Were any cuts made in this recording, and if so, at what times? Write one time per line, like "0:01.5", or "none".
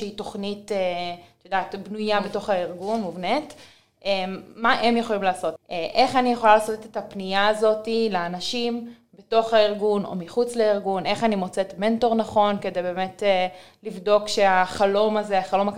0:05.6

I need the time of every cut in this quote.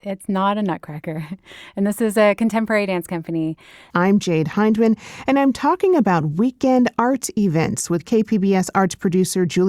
0:03.9

